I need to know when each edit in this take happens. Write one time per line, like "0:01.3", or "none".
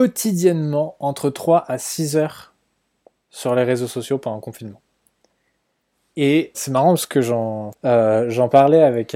0:06.5
0:07.7